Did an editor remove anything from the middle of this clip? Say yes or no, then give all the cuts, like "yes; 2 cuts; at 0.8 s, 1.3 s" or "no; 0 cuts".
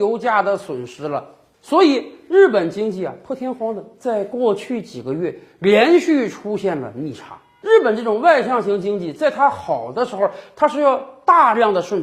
no; 0 cuts